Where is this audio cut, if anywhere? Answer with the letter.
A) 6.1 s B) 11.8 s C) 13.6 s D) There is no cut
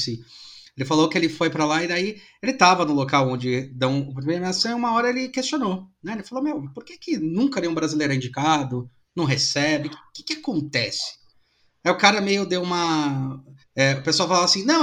C